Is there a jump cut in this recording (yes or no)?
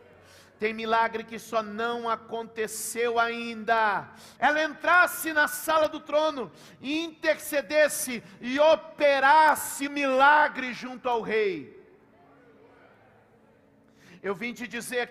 yes